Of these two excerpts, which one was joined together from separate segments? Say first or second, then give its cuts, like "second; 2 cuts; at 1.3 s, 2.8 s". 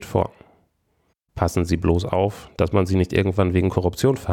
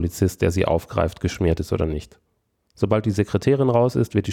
second; 1 cut; at 2.7 s